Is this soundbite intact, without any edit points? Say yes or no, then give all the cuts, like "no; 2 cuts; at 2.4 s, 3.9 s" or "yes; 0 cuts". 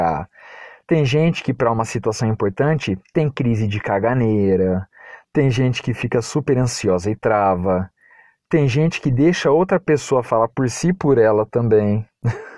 yes; 0 cuts